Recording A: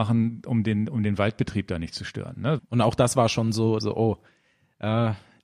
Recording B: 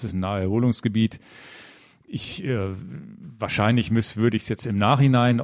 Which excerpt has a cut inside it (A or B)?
A